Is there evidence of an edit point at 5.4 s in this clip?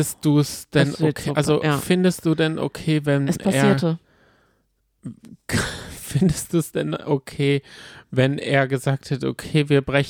no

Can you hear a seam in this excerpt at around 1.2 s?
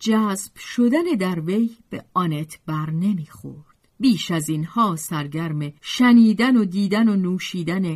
no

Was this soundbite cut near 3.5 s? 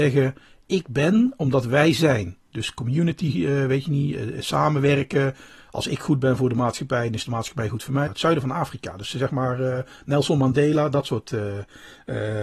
no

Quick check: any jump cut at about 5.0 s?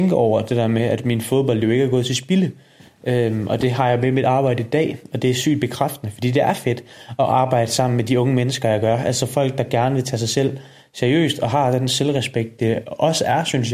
no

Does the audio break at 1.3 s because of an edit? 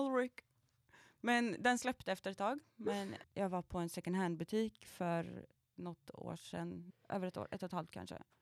no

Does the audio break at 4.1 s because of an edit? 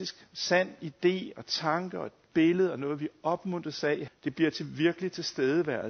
yes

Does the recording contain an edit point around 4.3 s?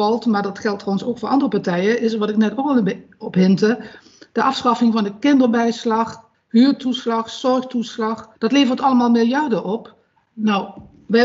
no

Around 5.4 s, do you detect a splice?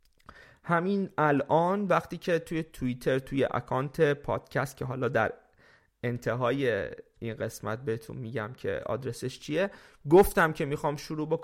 no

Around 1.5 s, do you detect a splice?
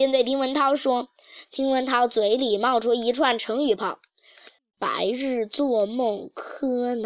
yes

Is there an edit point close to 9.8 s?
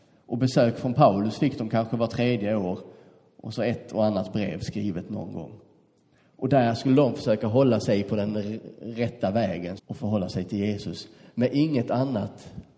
yes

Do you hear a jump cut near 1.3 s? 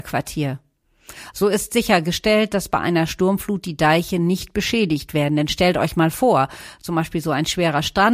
yes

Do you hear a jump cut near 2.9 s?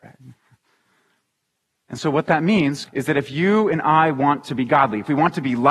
yes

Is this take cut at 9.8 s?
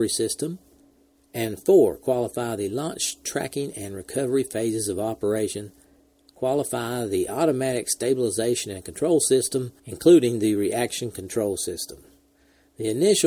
yes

